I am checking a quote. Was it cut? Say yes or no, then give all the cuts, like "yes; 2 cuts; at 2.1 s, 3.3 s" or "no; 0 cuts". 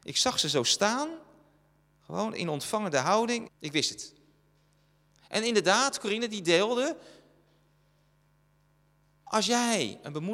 yes; 1 cut; at 3.5 s